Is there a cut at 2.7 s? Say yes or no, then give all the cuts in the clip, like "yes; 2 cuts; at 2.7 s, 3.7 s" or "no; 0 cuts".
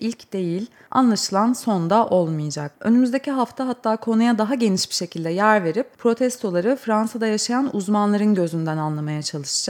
yes; 1 cut; at 2.7 s